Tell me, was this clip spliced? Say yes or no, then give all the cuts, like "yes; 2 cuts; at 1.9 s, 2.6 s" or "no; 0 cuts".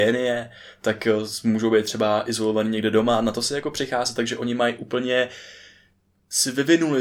no; 0 cuts